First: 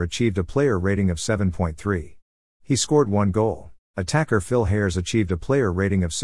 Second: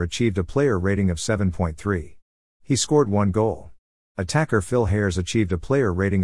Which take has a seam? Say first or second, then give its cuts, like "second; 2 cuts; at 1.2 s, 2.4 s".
first; 1 cut; at 3.8 s